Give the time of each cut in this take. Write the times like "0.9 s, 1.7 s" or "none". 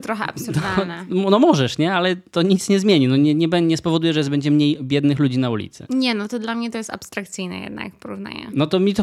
none